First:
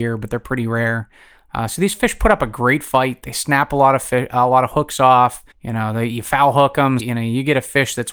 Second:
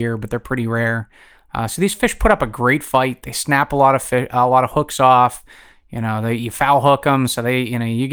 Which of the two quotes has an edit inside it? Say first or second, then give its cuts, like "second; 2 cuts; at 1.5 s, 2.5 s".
first; 2 cuts; at 5.5 s, 7.0 s